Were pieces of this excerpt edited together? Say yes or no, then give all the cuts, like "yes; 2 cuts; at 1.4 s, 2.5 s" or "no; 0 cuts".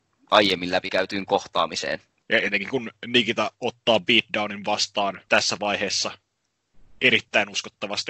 yes; 2 cuts; at 2.2 s, 5.3 s